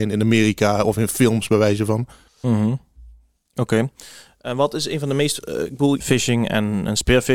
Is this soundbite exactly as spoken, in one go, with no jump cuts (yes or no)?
no